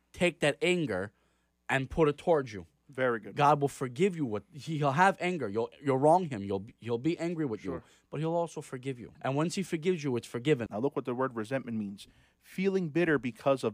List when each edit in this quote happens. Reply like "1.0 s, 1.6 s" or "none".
9.1 s, 10.7 s